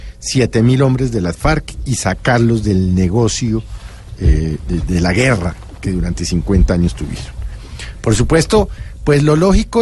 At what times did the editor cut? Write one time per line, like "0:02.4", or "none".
0:04.8